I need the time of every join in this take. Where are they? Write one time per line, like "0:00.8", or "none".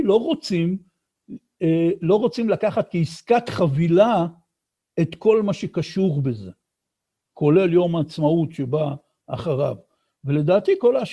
none